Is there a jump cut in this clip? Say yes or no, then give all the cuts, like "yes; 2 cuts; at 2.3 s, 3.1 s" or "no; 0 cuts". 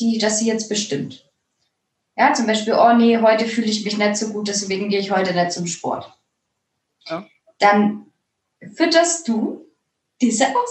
no; 0 cuts